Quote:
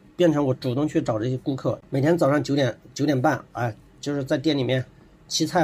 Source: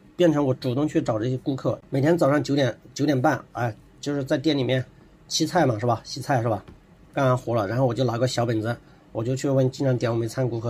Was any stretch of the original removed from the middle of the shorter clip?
no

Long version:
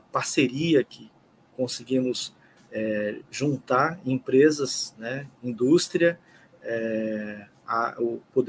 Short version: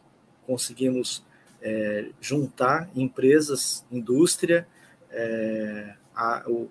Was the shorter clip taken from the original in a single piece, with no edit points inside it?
no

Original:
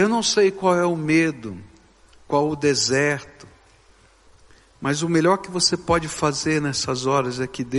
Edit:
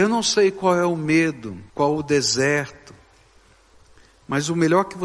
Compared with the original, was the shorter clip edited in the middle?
yes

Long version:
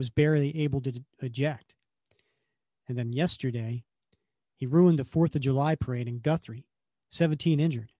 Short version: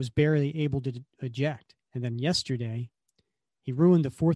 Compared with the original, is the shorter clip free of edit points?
no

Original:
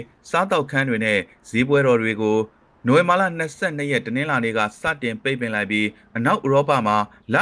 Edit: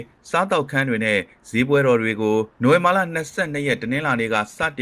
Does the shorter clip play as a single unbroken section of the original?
no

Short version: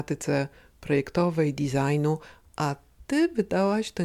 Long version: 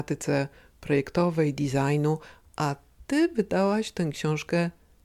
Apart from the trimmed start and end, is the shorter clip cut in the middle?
no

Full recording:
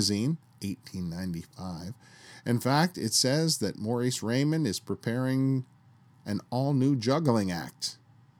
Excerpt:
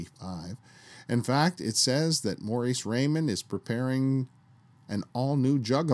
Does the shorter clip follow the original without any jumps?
yes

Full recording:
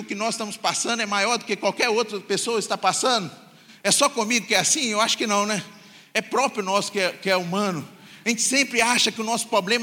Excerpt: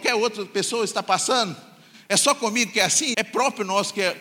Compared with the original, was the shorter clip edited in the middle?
yes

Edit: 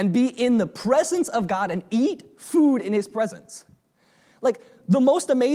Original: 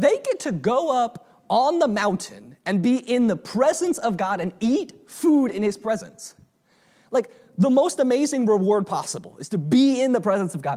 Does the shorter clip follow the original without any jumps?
yes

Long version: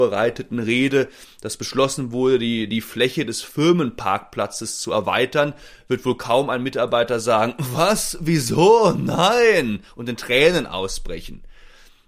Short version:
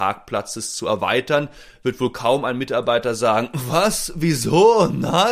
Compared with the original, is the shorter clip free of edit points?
yes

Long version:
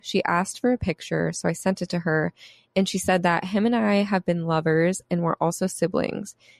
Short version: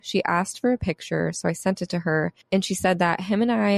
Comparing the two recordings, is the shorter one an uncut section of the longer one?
no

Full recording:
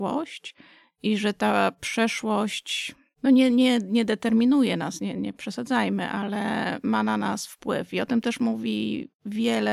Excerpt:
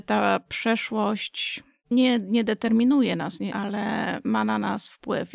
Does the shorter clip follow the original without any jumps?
no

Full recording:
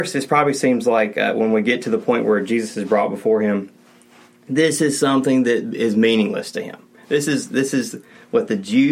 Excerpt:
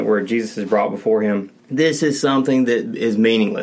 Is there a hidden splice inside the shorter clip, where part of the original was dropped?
yes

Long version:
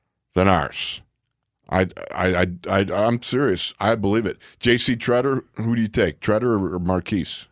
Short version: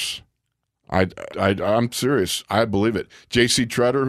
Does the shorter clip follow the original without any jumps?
no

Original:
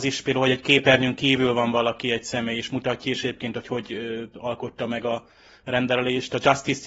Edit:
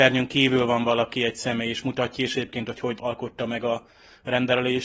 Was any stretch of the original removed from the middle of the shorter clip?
yes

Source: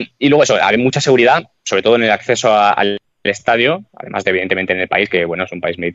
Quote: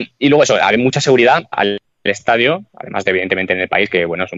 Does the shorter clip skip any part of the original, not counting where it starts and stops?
yes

